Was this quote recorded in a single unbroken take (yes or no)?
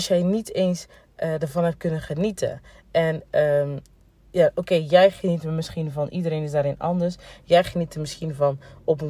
no